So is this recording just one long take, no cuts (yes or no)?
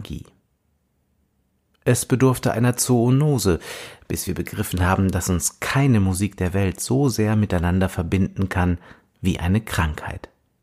yes